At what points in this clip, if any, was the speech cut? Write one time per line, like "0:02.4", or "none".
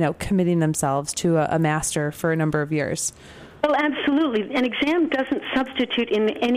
none

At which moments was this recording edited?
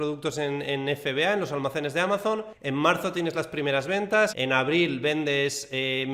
0:04.3

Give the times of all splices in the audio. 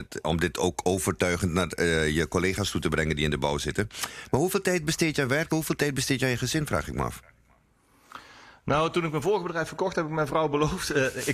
none

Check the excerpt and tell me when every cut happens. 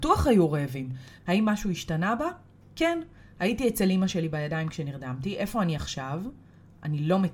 0:01.2

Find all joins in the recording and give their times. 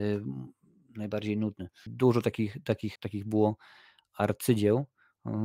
0:01.9
0:03.0

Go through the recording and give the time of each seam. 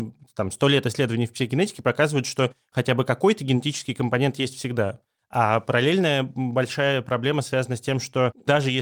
0:05.2

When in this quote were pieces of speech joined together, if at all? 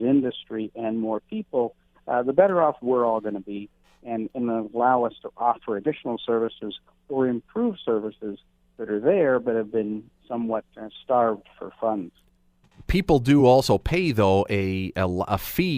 none

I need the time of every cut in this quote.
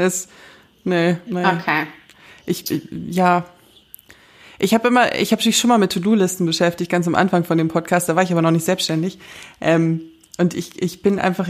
0:01.3

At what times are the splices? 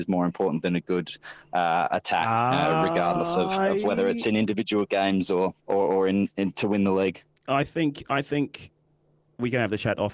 0:05.6

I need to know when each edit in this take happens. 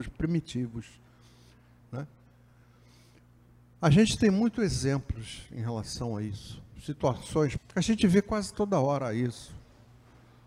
0:01.8
0:07.6

